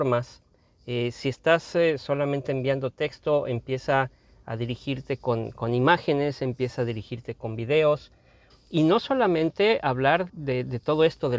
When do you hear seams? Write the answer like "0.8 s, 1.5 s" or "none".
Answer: 8.5 s, 10.3 s

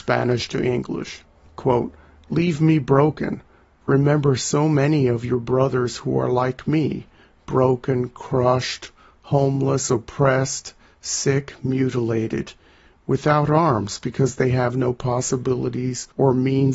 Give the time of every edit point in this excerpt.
3.7 s

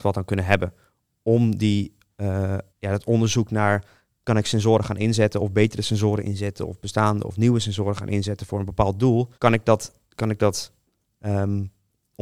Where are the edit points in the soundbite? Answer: 2.7 s, 9.3 s

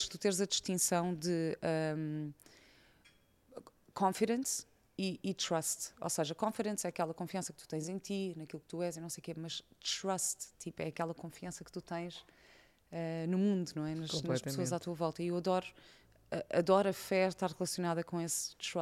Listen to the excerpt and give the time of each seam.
none

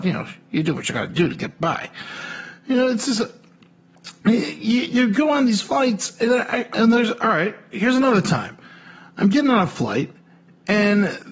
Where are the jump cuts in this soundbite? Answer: 6.7 s

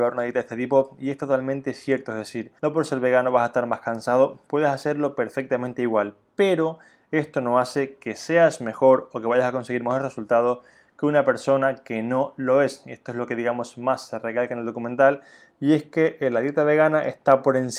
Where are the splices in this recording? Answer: 2.6 s

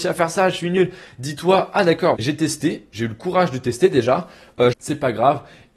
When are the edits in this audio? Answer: 2.1 s, 4.7 s

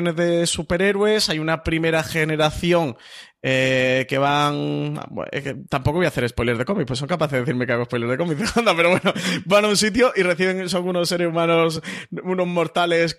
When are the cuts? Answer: none

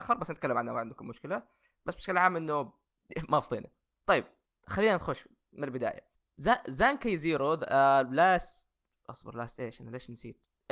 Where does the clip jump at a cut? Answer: none

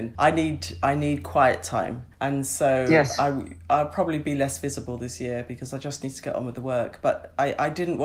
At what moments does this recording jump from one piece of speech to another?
2.1 s

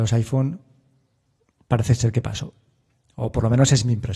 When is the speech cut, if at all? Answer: none

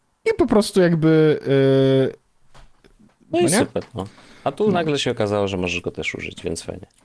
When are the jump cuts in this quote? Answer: 3.3 s

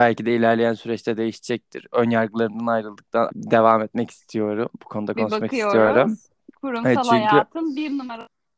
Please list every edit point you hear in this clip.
3.3 s

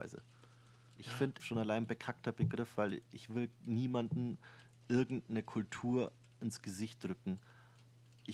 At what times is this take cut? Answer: 1.4 s

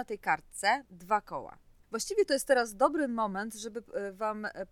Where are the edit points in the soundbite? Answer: 1.8 s

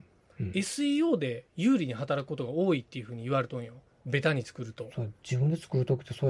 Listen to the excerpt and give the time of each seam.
4.0 s

